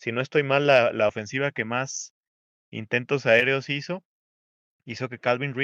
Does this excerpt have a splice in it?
no; 0 cuts

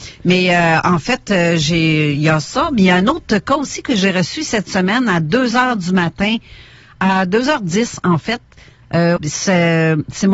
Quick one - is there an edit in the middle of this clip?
yes; 1 cut; at 9.2 s

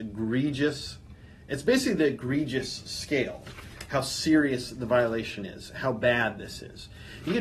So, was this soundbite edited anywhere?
no; 0 cuts

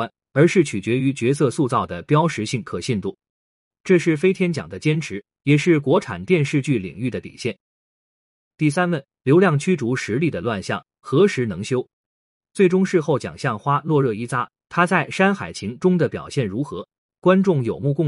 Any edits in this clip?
yes; 1 cut; at 12.4 s

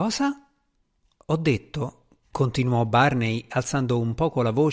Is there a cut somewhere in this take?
no; 0 cuts

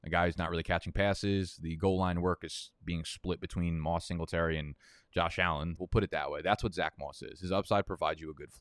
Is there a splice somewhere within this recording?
yes; 1 cut; at 5.8 s

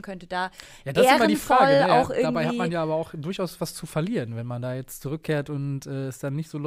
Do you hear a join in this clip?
no; 0 cuts

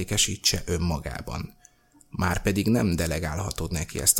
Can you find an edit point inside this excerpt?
no; 0 cuts

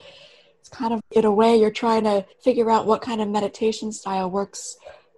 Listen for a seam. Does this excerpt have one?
yes; 2 cuts; at 1.0 s, 2.3 s

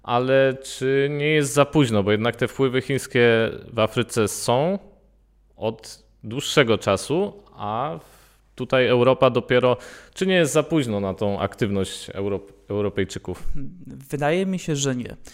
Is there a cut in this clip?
no; 0 cuts

